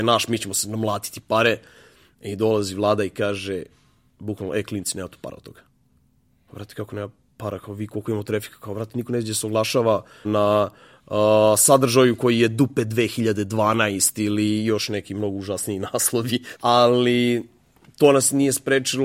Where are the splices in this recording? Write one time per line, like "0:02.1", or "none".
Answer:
0:10.2
0:16.6